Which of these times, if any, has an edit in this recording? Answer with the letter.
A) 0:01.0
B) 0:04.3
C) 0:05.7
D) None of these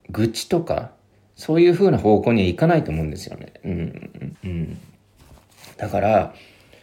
B